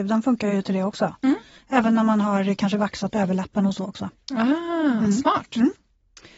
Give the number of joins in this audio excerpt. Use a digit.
0